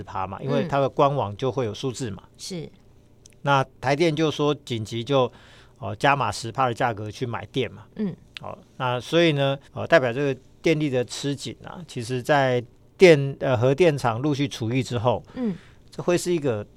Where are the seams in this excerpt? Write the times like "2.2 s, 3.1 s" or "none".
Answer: 9.7 s